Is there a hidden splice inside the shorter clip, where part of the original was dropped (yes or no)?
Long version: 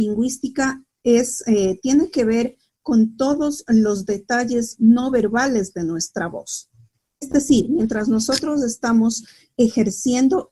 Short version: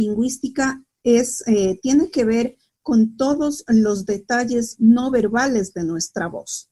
no